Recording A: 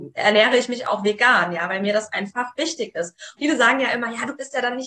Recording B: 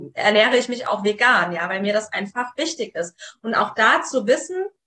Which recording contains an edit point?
A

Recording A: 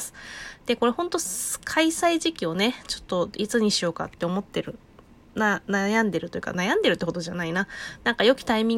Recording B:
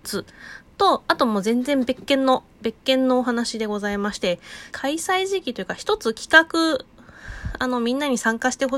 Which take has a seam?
B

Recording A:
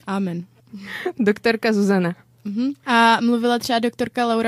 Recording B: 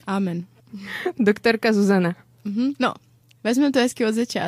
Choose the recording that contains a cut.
B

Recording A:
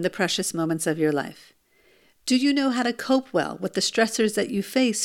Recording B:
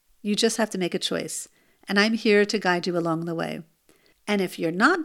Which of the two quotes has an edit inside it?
B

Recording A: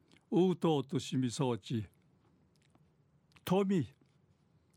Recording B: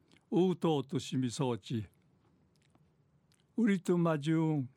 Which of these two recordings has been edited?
A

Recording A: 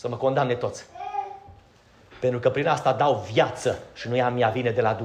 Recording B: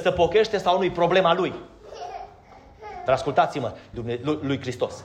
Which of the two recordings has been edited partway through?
B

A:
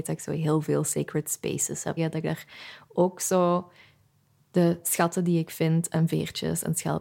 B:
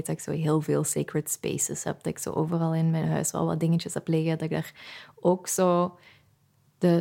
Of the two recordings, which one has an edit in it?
A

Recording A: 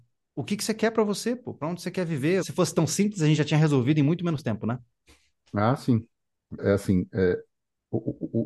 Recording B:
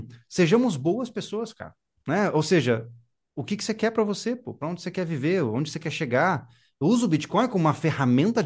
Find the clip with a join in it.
A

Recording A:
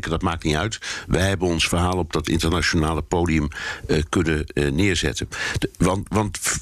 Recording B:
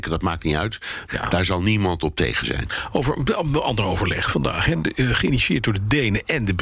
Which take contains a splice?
B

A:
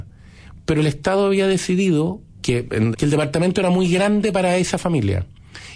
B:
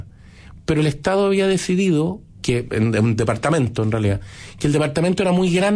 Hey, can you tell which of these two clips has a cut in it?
A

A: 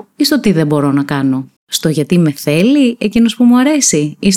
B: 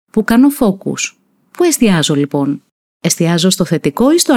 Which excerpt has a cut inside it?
A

